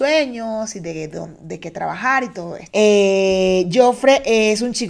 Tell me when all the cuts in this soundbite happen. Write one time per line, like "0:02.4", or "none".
0:02.7

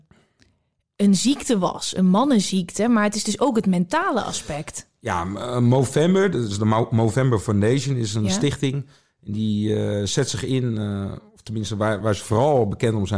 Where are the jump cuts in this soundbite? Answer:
0:12.0

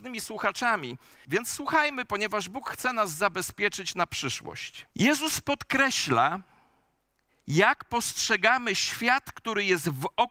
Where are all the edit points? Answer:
0:01.2
0:04.9

